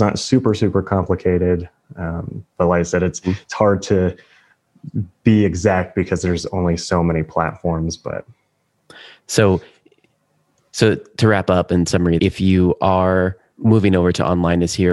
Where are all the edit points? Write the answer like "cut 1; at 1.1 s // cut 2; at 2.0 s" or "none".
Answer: cut 1; at 12.2 s